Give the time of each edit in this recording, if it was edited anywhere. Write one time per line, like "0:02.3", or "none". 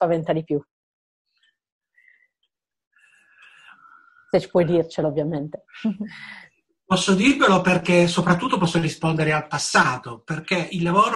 none

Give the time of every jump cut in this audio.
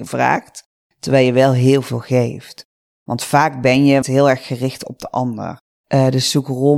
0:02.9
0:04.0
0:05.8

